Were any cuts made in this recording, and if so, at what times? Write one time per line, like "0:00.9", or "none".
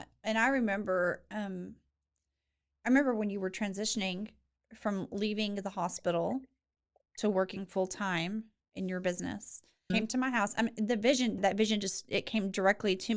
0:09.9
0:11.4